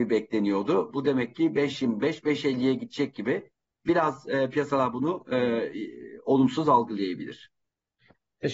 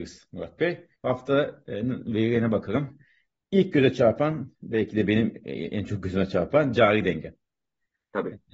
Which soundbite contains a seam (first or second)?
second